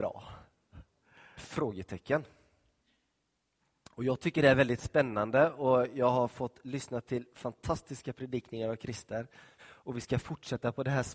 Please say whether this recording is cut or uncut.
cut